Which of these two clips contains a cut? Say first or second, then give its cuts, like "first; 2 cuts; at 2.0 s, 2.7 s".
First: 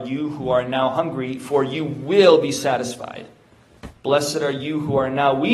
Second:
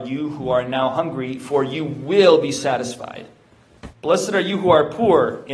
second; 1 cut; at 3.9 s